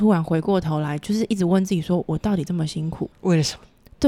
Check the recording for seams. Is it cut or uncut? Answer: cut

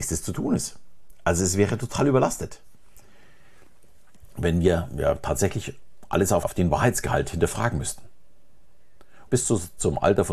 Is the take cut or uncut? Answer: cut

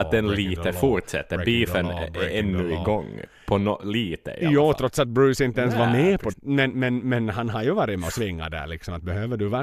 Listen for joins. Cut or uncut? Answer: cut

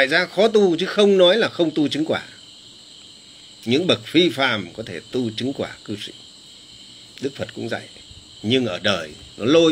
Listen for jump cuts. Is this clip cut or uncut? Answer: uncut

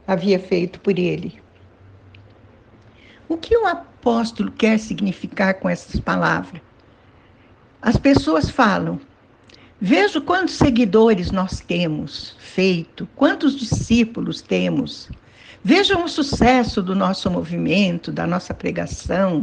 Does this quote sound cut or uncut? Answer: uncut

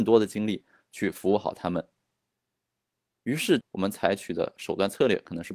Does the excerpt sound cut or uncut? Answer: cut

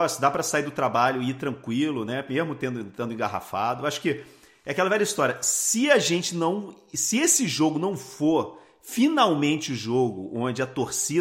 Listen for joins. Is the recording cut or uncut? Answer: uncut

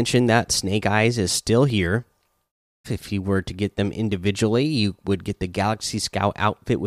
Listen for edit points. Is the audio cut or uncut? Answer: cut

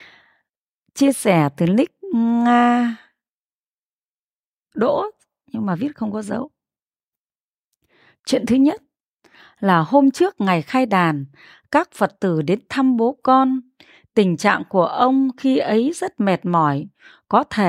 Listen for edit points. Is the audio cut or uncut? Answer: uncut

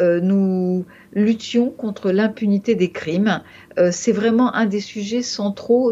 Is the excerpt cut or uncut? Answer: uncut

